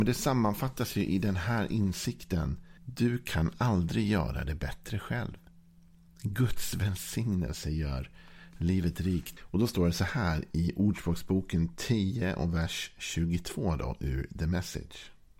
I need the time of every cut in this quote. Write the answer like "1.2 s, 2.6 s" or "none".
2.8 s, 9.4 s